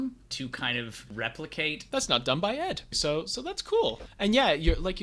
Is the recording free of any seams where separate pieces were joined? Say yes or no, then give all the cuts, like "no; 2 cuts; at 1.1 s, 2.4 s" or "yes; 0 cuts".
no; 2 cuts; at 1.9 s, 2.9 s